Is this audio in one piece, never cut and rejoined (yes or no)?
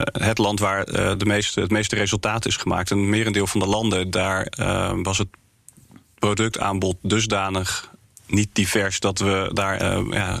yes